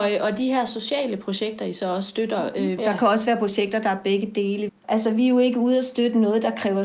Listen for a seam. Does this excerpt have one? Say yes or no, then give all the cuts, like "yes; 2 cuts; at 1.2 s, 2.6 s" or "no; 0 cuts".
yes; 2 cuts; at 2.8 s, 4.7 s